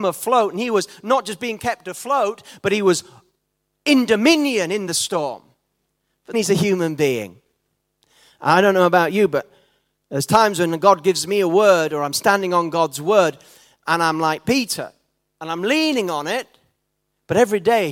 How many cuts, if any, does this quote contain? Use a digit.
1